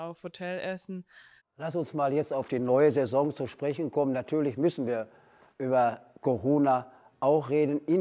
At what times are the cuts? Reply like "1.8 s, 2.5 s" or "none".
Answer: 1.4 s